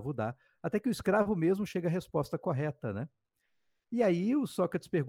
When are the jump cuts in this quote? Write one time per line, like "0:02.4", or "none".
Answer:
none